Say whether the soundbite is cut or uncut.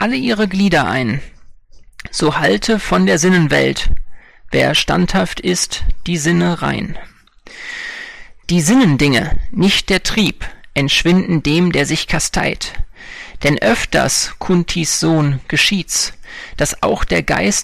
cut